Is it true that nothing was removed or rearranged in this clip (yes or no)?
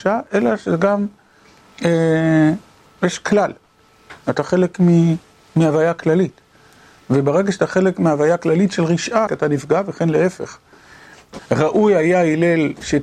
no